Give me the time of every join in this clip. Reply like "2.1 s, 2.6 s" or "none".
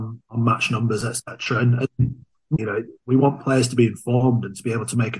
2.6 s

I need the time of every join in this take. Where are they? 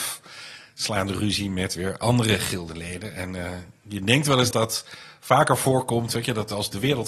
4.5 s

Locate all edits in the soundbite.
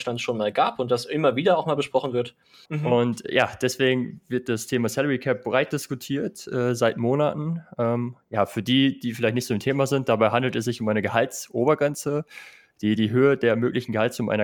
2.6 s

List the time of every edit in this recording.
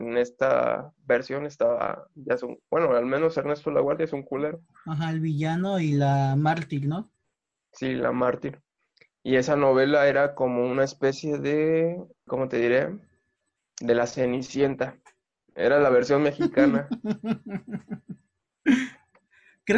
12.3 s

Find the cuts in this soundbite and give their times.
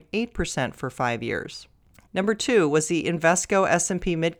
2.1 s

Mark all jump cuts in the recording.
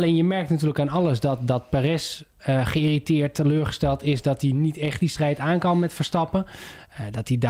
none

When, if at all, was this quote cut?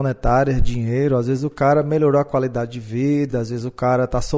none

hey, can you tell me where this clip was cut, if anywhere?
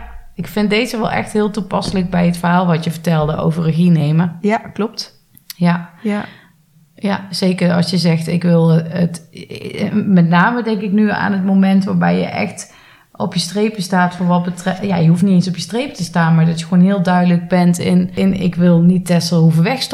none

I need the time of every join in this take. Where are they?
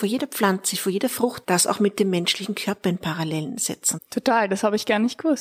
1.4 s, 4.0 s

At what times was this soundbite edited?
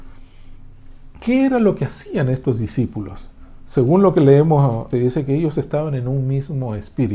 1.2 s, 4.9 s

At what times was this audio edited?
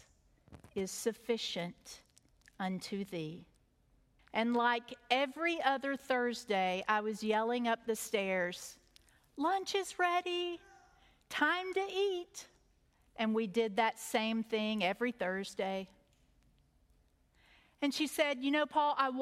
4.2 s

